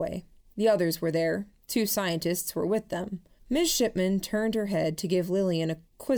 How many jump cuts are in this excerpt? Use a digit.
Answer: 1